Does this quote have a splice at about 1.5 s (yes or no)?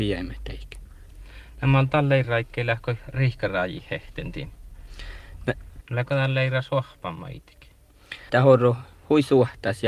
no